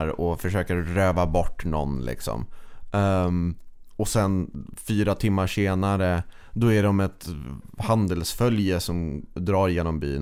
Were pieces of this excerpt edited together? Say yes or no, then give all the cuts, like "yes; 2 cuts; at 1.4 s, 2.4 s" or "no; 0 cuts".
no; 0 cuts